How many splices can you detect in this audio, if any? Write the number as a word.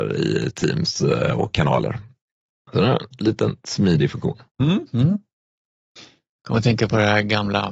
two